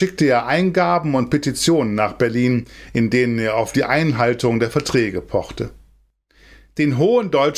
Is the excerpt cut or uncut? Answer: uncut